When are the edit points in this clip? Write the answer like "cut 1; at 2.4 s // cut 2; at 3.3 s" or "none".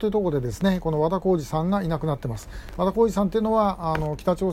none